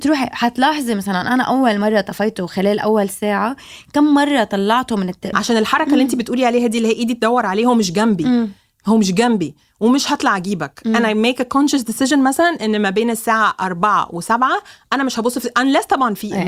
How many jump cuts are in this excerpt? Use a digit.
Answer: 1